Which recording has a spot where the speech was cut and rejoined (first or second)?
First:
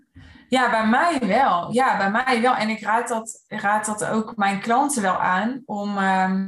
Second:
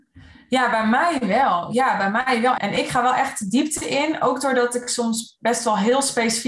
second